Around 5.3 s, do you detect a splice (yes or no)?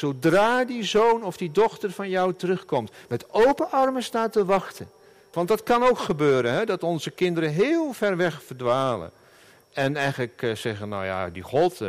yes